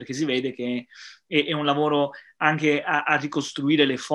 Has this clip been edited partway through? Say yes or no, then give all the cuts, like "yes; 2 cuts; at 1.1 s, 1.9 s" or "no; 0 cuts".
no; 0 cuts